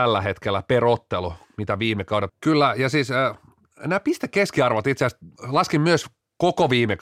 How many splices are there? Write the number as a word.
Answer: two